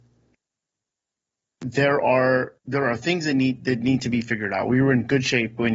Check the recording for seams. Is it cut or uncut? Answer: cut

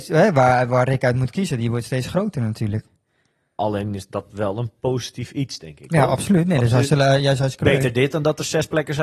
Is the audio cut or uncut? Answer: uncut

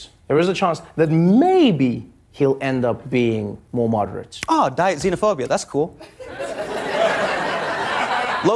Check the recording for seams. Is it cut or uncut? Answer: uncut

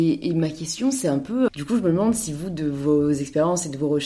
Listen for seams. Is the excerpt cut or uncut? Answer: cut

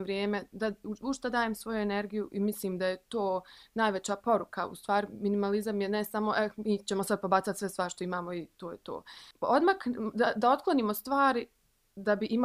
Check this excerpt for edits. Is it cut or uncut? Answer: cut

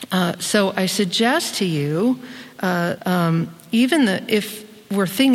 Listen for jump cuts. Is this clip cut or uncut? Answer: cut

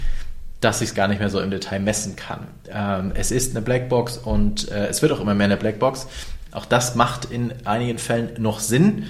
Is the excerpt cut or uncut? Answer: cut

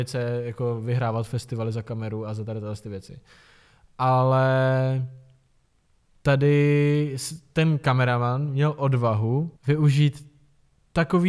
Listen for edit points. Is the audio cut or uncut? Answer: cut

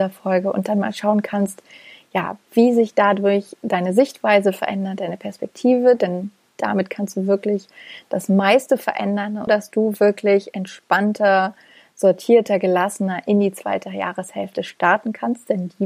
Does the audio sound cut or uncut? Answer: cut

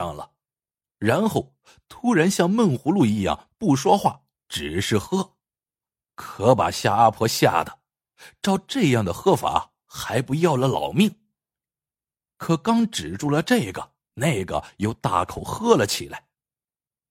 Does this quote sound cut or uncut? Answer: uncut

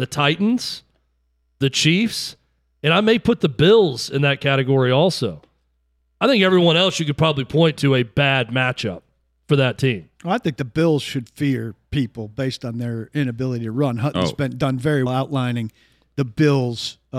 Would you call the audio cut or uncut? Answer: cut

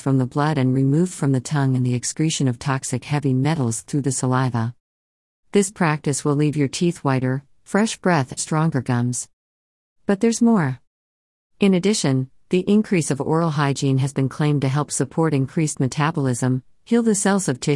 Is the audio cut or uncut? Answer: cut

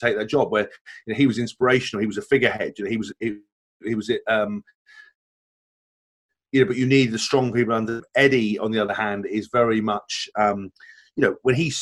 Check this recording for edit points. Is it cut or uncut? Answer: uncut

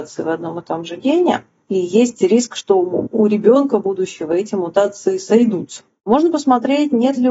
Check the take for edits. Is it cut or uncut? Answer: uncut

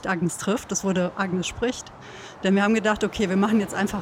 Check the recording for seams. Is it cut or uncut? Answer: uncut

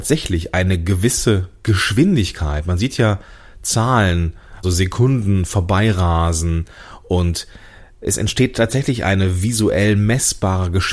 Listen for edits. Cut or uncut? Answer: cut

